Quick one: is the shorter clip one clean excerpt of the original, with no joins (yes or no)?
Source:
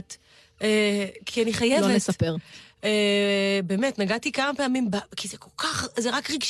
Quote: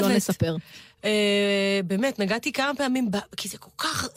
yes